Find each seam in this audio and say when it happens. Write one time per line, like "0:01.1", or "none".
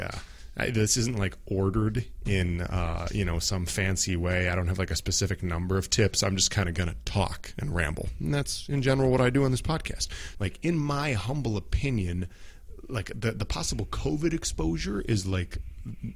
0:10.3